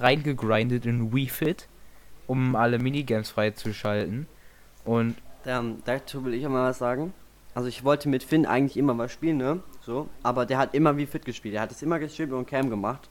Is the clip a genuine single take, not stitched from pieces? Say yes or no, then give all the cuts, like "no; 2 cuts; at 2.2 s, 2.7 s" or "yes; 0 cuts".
yes; 0 cuts